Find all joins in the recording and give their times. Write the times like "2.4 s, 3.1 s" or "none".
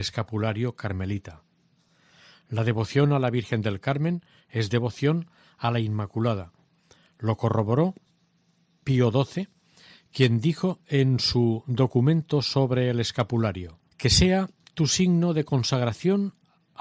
13.9 s

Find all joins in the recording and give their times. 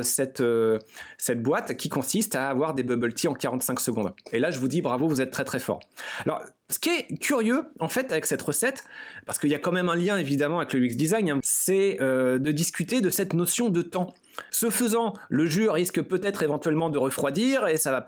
11.4 s, 14.5 s

